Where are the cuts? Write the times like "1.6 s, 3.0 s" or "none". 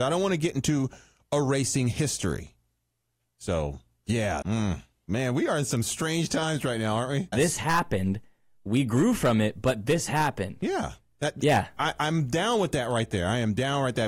4.4 s, 7.3 s